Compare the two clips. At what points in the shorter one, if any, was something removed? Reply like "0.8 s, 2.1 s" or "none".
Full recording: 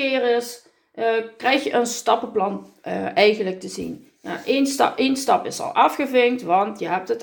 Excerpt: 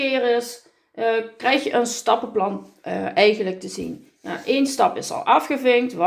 4.7 s